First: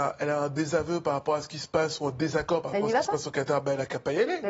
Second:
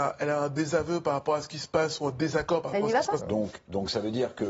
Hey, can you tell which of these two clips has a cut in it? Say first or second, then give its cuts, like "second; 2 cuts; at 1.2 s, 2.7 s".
second; 1 cut; at 3.2 s